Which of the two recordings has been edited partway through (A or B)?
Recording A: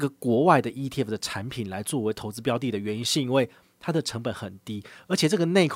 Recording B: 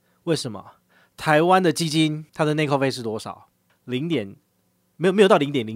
B